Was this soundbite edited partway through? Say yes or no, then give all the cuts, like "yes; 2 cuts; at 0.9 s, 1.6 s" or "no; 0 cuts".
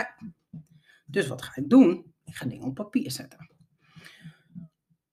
no; 0 cuts